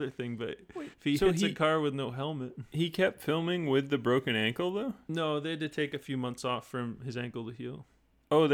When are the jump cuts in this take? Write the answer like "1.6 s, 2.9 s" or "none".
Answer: none